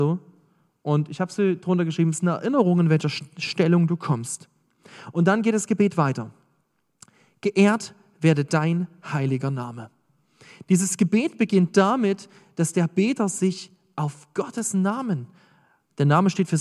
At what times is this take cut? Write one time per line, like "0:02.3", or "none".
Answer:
none